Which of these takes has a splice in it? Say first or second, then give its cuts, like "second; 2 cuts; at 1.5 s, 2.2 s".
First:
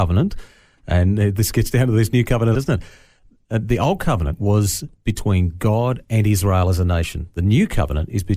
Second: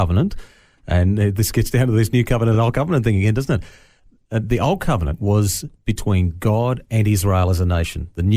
first; 1 cut; at 2.5 s